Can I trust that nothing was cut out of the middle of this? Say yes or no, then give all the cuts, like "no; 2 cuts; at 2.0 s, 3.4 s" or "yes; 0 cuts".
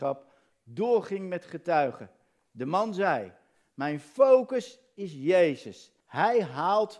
no; 1 cut; at 6.0 s